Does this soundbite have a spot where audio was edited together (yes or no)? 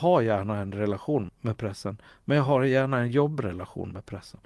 yes